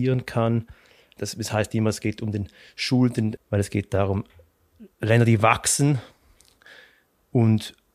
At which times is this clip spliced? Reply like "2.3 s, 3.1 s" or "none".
1.2 s, 3.4 s